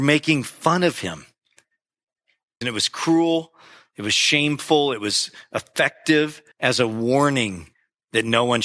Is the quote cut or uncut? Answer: cut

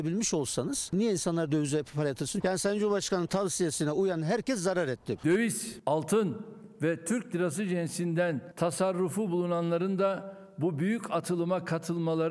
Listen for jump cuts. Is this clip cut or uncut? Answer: cut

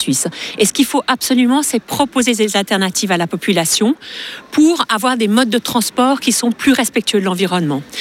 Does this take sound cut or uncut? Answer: uncut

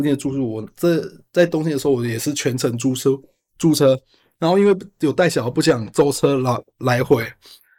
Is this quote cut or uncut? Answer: uncut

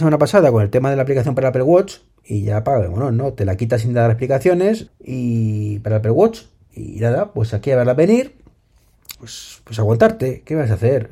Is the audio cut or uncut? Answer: cut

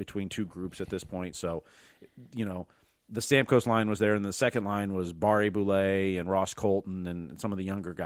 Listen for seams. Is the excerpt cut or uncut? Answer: cut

